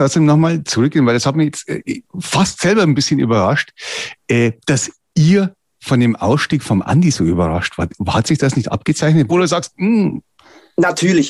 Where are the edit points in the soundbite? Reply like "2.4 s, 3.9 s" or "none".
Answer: 9.3 s